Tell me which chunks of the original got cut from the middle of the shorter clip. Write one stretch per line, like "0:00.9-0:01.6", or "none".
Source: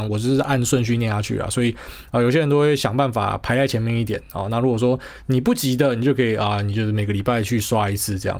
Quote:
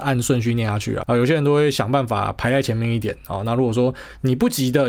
0:01.5-0:02.1